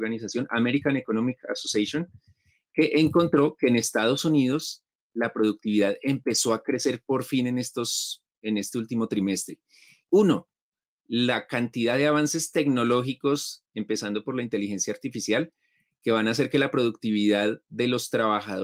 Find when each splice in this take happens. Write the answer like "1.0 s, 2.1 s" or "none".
10.0 s